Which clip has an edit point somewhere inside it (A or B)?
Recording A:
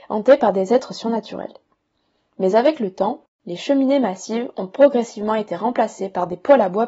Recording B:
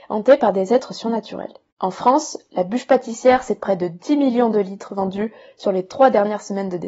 B